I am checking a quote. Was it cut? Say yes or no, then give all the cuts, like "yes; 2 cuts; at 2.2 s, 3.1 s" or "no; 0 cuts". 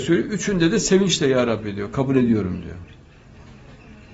no; 0 cuts